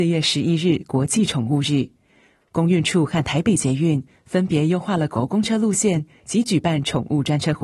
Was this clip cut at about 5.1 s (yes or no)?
yes